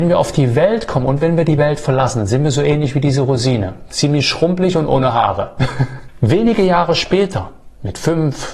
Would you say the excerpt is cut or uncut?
uncut